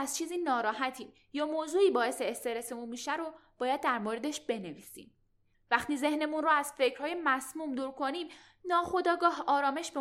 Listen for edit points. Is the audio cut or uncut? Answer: cut